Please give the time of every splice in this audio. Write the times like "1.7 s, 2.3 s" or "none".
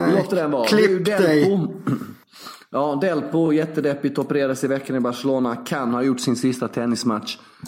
none